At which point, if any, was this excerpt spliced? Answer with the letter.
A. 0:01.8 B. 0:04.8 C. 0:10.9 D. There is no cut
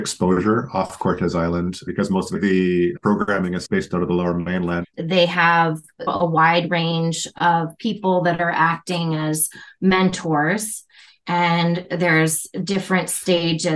B